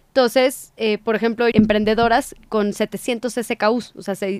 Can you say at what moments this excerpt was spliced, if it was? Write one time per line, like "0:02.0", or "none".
0:01.5